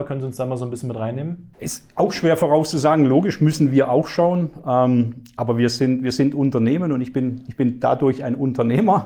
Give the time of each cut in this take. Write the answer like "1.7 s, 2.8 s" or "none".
1.5 s